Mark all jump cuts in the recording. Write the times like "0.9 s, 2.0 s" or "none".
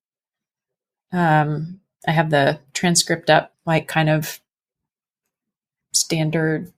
3.5 s